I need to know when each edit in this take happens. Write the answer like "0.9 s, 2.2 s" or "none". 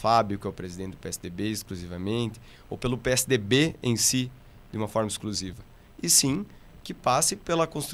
none